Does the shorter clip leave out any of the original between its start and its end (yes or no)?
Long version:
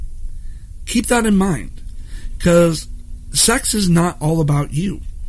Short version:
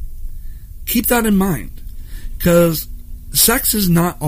no